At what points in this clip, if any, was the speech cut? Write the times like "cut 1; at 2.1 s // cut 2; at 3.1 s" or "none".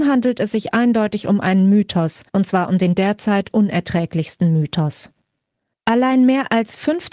cut 1; at 2.3 s

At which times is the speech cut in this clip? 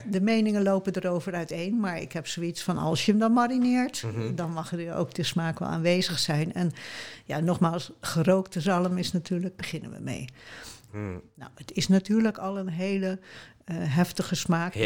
cut 1; at 9.6 s // cut 2; at 10.9 s

